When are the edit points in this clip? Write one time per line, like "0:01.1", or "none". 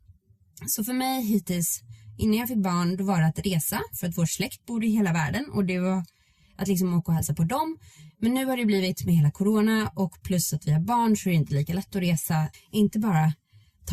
0:12.5